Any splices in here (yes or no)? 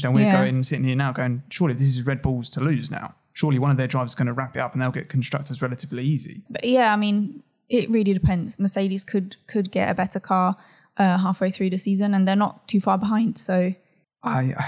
yes